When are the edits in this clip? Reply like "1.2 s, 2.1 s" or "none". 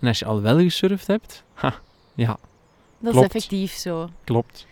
1.4 s